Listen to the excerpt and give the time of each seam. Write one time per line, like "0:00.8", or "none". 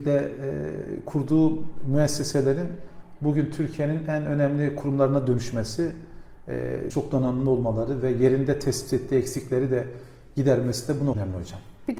0:06.9